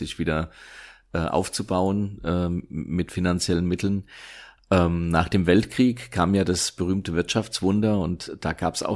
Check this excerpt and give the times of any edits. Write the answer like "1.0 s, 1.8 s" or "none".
none